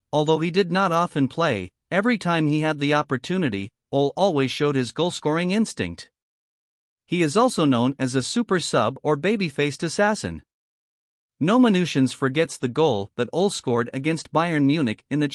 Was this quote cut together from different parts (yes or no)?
no